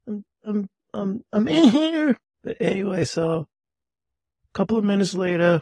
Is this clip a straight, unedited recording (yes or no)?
yes